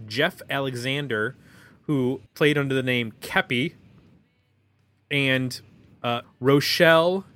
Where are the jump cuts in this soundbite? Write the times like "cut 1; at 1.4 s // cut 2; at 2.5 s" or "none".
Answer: cut 1; at 2.3 s // cut 2; at 6.2 s